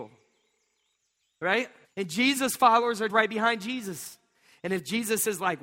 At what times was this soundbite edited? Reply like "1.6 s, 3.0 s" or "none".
1.8 s, 3.1 s